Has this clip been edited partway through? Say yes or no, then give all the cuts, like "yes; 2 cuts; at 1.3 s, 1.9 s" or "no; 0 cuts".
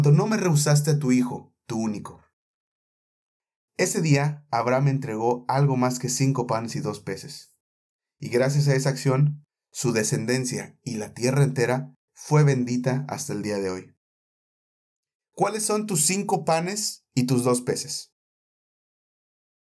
yes; 1 cut; at 15.2 s